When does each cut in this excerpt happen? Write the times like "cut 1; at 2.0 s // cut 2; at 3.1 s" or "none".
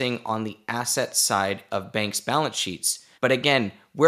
cut 1; at 3.1 s